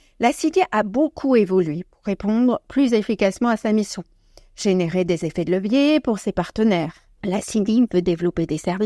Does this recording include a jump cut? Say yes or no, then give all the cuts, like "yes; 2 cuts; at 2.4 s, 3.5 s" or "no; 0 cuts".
yes; 1 cut; at 7.2 s